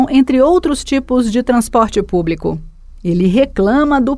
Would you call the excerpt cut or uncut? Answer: uncut